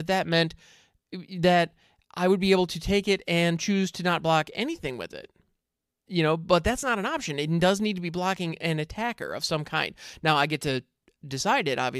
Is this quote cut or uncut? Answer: uncut